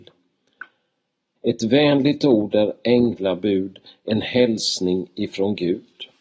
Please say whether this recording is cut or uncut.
cut